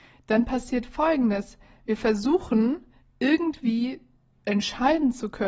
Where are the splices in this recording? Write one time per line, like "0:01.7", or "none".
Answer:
none